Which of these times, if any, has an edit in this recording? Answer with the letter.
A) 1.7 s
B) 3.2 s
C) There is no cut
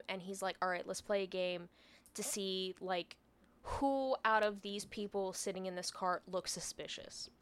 C